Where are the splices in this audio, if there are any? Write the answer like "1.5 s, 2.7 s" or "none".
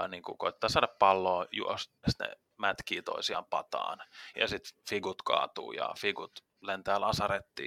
2.0 s, 4.3 s